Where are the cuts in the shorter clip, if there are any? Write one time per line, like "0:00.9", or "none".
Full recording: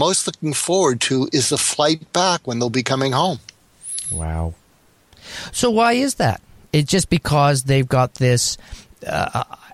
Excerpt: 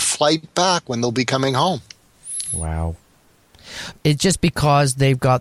0:03.9